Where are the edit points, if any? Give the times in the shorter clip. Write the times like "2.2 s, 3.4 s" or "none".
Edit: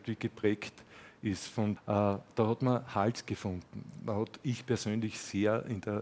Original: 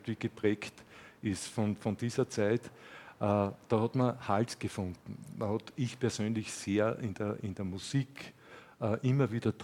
1.8 s